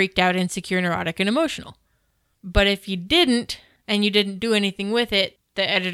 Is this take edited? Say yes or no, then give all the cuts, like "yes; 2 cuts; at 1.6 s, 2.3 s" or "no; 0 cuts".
no; 0 cuts